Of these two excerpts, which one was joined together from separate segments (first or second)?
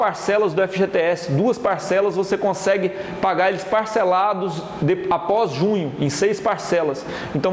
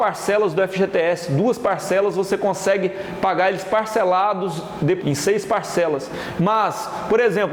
second